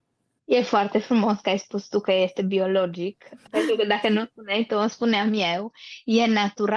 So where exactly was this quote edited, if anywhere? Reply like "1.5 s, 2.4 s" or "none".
3.5 s